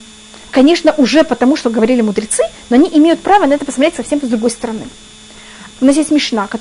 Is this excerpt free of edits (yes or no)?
no